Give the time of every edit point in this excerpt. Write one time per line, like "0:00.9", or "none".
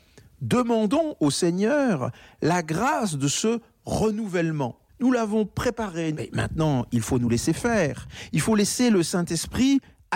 0:04.9
0:06.1